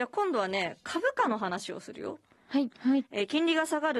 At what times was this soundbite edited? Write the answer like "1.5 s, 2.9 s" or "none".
2.7 s